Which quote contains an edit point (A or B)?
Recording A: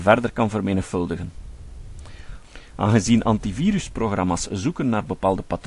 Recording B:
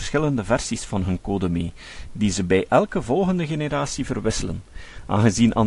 A